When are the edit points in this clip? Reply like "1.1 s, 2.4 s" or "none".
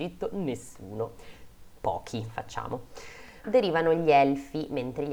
3.4 s